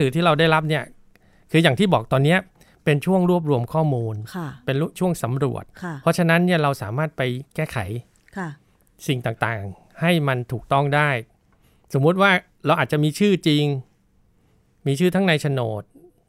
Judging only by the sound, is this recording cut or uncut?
uncut